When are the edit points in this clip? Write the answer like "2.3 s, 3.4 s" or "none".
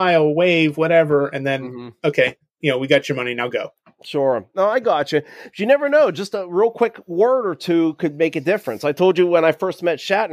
none

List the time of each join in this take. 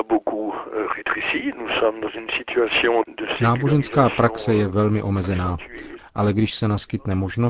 6.0 s

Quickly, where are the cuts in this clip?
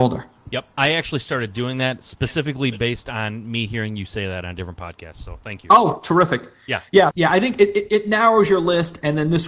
7.1 s

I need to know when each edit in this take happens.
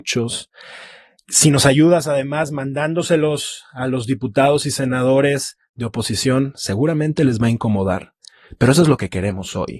none

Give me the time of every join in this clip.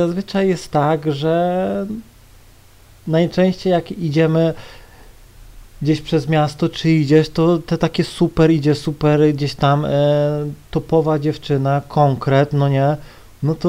none

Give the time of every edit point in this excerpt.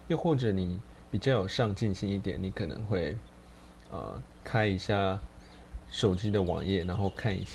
none

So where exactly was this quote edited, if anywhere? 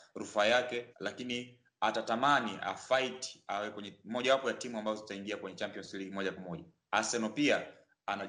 0.9 s

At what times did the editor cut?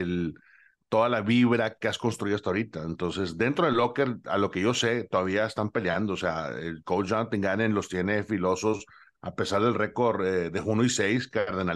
none

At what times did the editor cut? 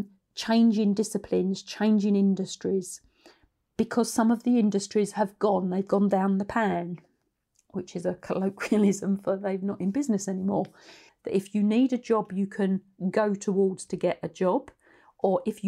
11.1 s

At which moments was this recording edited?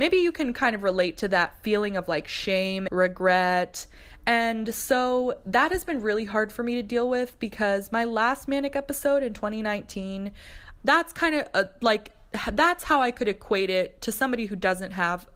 2.9 s, 10.8 s

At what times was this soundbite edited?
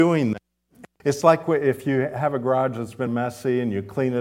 1.0 s, 3.1 s

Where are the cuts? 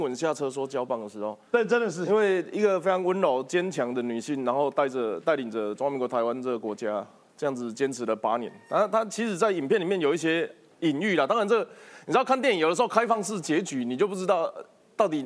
none

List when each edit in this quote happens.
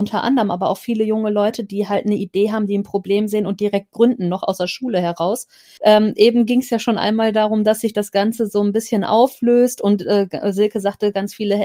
5.8 s

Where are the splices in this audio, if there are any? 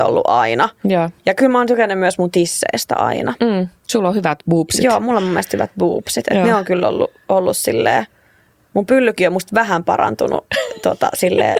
none

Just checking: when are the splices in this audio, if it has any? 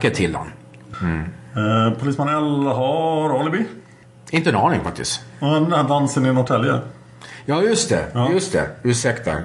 0.9 s

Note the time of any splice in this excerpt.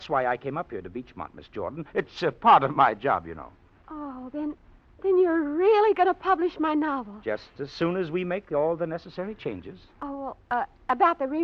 none

